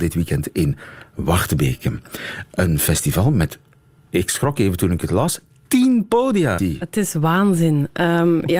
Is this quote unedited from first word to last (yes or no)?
no